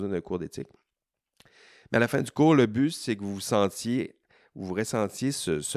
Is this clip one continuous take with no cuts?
yes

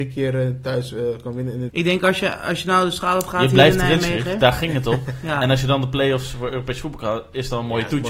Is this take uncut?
no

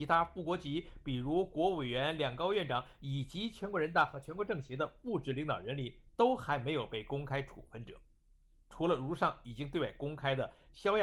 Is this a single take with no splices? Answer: yes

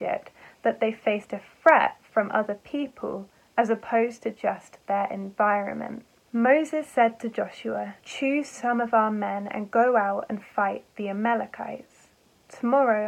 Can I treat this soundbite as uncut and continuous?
no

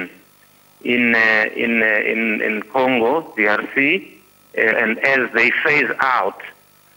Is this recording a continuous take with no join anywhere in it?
no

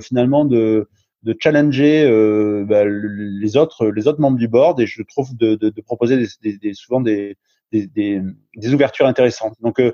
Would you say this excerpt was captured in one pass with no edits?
yes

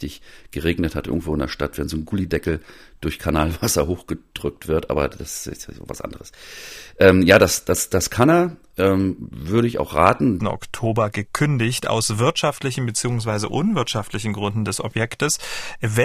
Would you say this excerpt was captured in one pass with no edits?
no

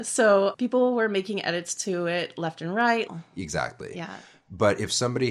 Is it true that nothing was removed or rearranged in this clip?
no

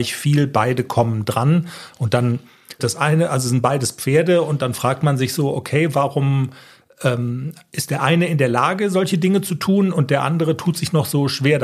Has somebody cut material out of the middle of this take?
yes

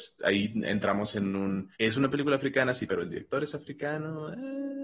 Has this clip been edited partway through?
yes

